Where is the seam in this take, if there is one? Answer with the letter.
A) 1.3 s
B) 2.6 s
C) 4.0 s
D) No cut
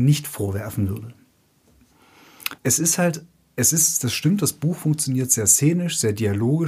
B